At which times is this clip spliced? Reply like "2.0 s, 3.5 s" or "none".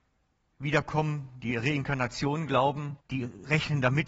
3.0 s